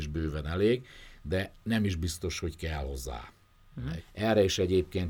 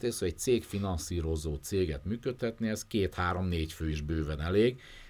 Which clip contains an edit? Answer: first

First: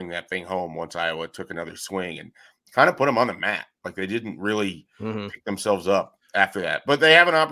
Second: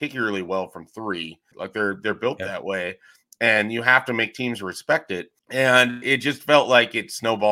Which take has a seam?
second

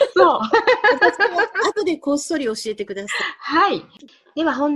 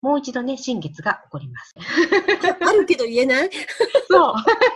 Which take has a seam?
second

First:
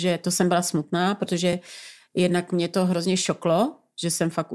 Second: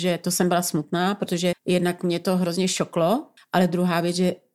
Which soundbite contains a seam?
second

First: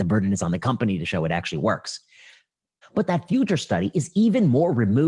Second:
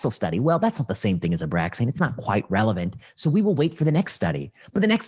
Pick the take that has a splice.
first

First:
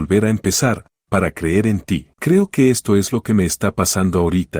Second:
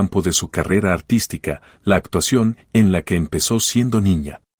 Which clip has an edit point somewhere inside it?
first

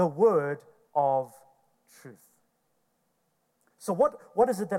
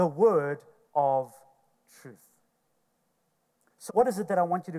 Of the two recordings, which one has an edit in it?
second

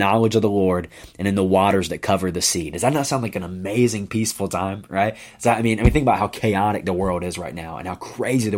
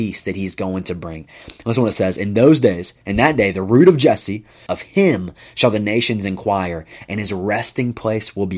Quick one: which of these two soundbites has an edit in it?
second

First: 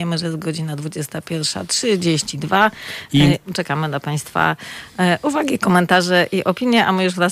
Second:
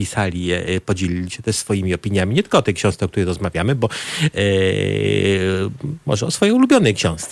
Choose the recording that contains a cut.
first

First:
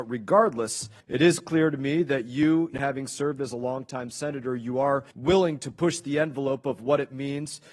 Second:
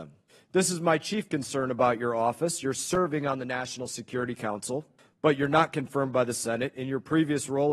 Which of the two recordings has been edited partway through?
first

